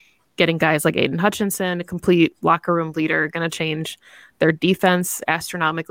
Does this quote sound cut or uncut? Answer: cut